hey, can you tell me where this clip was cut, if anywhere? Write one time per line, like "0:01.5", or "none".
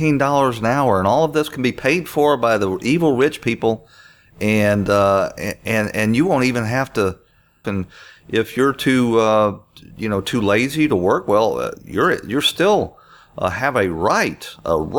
0:07.6